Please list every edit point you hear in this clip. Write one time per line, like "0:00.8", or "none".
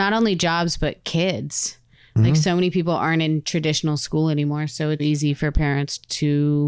0:05.0